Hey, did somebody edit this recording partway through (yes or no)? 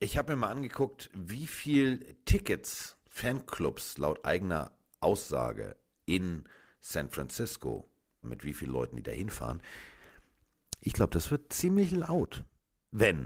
yes